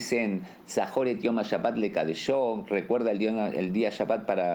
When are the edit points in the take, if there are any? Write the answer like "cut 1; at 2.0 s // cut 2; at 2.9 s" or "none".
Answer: none